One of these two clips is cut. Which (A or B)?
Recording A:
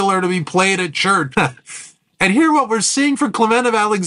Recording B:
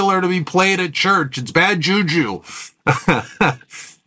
A